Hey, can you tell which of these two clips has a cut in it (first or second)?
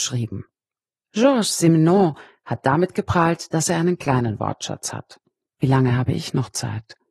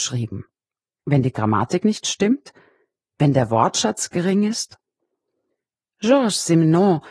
first